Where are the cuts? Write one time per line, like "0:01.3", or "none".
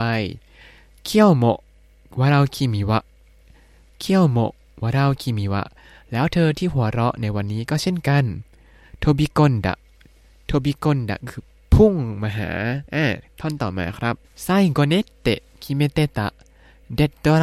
0:12.9
0:14.2